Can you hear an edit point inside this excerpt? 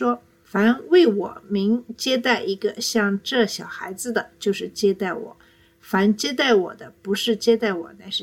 no; 0 cuts

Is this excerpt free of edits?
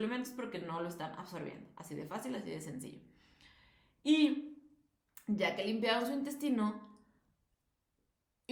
yes; 0 cuts

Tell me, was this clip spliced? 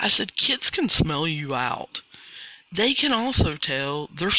yes; 1 cut; at 2.7 s

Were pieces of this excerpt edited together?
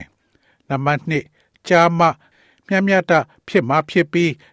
yes; 1 cut; at 3.1 s

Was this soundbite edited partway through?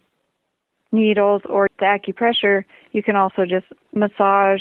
yes; 1 cut; at 1.7 s

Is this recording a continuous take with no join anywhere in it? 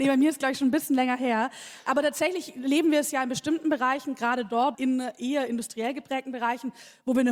no; 1 cut; at 4.7 s

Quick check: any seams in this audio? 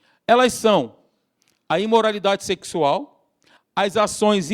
yes; 1 cut; at 3.6 s

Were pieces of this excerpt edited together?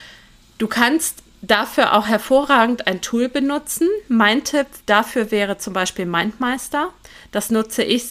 no; 0 cuts

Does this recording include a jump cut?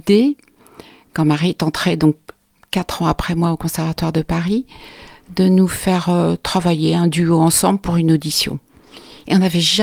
no; 0 cuts

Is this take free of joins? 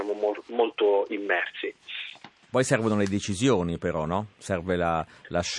yes; 0 cuts

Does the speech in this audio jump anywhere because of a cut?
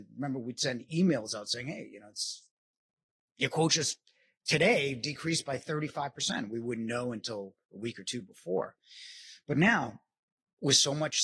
no; 0 cuts

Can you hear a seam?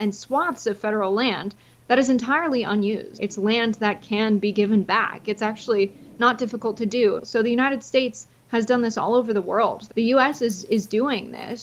yes; 3 cuts; at 3.1 s, 7.2 s, 9.9 s

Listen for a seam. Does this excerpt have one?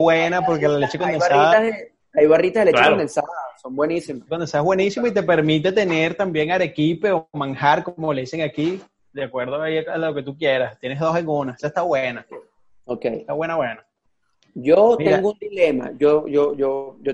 no; 0 cuts

